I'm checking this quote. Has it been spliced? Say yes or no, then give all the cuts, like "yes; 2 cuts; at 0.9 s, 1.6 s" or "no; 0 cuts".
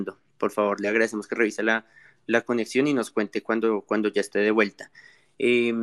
no; 0 cuts